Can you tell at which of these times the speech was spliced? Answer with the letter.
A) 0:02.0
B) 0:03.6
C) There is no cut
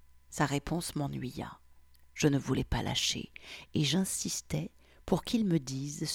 A